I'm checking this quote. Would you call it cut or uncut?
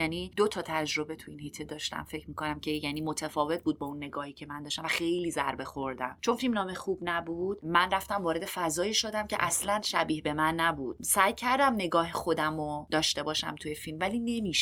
uncut